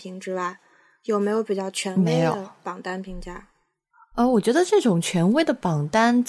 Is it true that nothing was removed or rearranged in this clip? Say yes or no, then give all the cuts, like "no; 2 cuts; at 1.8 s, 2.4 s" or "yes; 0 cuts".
yes; 0 cuts